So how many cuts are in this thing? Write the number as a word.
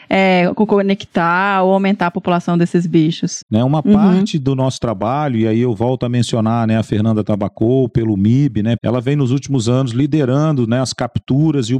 two